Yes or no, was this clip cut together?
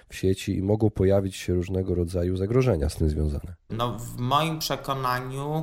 yes